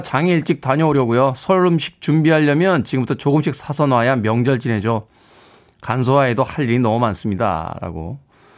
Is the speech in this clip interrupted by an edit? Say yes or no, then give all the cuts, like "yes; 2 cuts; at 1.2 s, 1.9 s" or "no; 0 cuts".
no; 0 cuts